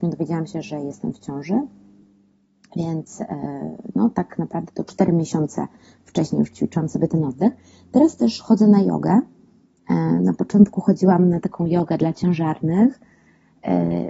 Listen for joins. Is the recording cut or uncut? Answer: uncut